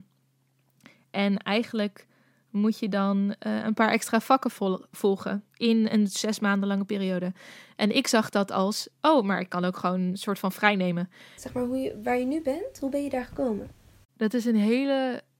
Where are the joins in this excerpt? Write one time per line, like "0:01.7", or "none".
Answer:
0:11.4